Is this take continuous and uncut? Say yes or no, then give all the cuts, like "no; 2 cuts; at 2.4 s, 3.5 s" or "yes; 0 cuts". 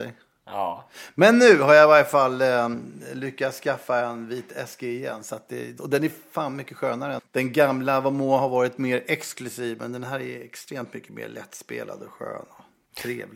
no; 2 cuts; at 5.8 s, 7.2 s